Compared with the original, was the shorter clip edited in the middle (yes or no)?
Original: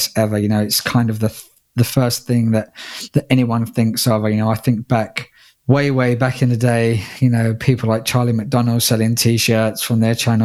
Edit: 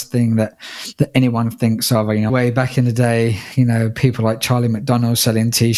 yes